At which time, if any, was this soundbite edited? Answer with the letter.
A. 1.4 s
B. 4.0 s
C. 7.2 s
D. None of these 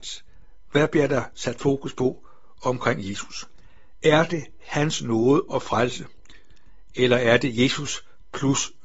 D